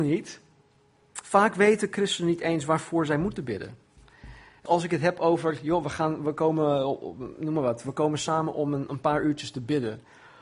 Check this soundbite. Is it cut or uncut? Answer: cut